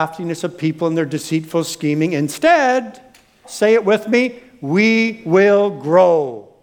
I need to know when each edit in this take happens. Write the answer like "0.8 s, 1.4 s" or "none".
3.4 s